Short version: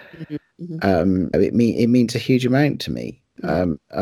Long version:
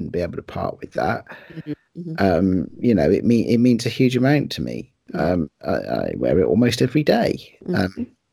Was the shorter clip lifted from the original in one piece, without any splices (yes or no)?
no